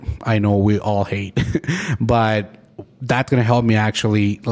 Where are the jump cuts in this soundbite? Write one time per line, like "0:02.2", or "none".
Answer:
none